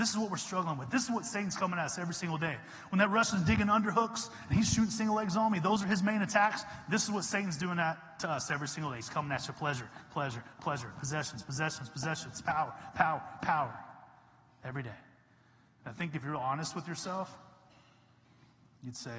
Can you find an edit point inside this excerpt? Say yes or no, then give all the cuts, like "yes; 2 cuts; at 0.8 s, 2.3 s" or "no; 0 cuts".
no; 0 cuts